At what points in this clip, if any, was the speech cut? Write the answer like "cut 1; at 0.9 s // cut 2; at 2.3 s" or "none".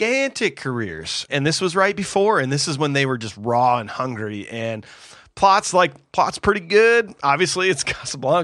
cut 1; at 1.3 s

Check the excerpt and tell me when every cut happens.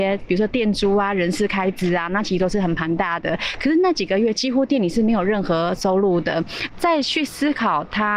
cut 1; at 6.7 s

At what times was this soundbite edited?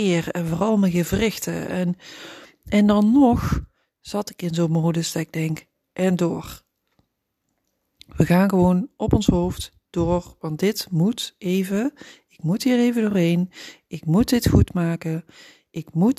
none

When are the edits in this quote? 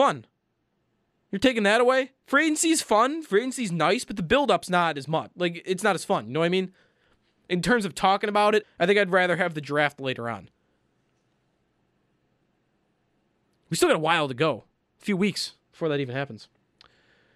cut 1; at 8.6 s

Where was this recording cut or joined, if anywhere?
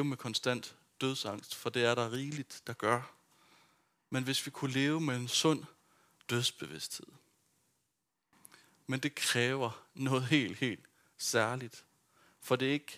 none

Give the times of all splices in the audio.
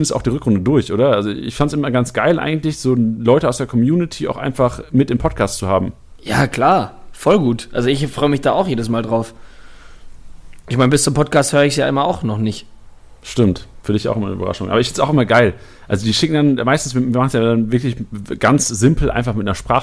none

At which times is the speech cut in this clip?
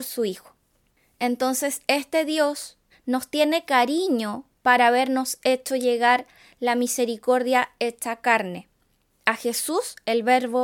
cut 1; at 2.9 s

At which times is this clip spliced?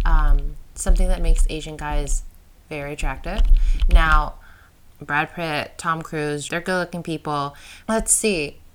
cut 1; at 4.9 s // cut 2; at 6.5 s // cut 3; at 7.8 s

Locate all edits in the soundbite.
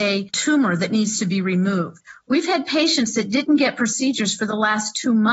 none

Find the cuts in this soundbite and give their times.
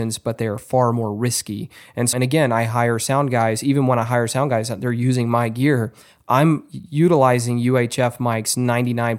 cut 1; at 2.1 s

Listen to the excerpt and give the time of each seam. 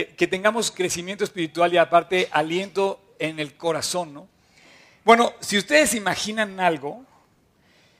none

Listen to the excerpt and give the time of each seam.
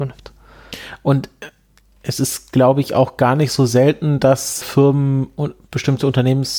cut 1; at 4.6 s

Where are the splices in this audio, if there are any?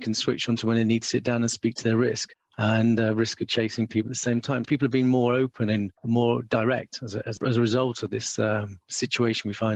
cut 1; at 4.7 s // cut 2; at 7.4 s

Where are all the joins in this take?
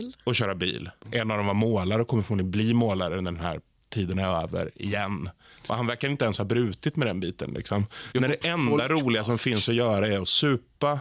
cut 1; at 1.0 s // cut 2; at 8.1 s

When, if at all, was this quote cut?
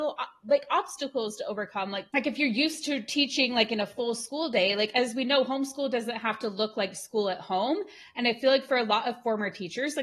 none

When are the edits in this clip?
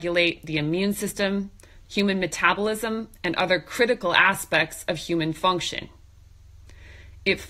cut 1; at 1.8 s

